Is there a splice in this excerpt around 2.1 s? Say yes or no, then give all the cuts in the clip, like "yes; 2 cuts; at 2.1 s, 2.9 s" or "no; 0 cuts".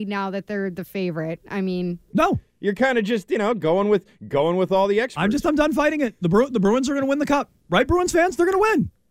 yes; 1 cut; at 2.1 s